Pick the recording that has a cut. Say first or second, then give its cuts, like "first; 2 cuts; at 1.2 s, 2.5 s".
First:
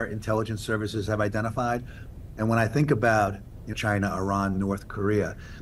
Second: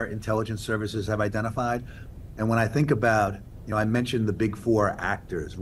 first; 1 cut; at 3.7 s